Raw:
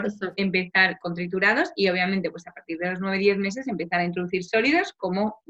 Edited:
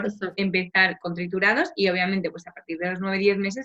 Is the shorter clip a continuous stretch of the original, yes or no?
yes